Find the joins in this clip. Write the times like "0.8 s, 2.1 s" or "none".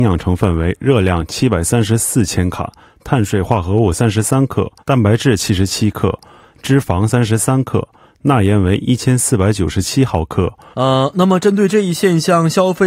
4.8 s, 10.7 s